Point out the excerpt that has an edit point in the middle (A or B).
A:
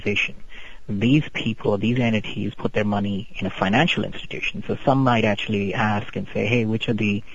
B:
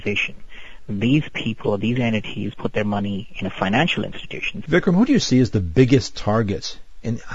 B